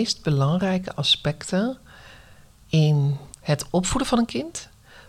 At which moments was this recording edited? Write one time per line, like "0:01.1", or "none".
0:03.3